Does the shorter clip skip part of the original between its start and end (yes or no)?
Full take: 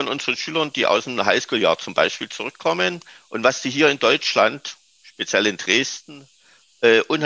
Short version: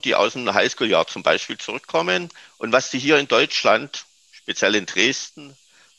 no